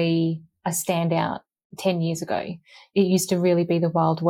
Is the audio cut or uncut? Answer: uncut